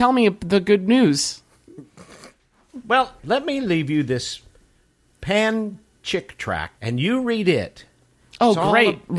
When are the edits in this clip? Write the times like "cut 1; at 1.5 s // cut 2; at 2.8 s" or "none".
cut 1; at 3.2 s // cut 2; at 6.8 s